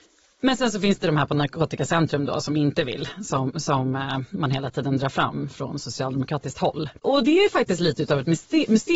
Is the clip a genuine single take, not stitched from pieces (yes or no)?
yes